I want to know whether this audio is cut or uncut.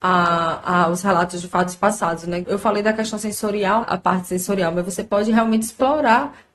cut